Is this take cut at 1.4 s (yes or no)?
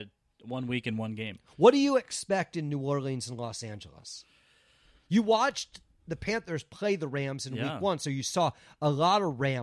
no